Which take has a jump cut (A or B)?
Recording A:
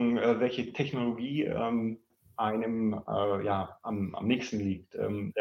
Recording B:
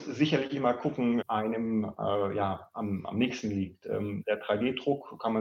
B